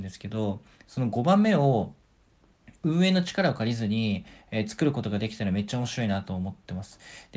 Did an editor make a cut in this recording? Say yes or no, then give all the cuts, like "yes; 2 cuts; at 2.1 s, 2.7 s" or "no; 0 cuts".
yes; 1 cut; at 4.4 s